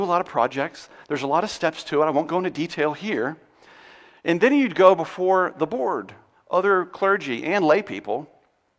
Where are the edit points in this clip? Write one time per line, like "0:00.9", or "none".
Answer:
none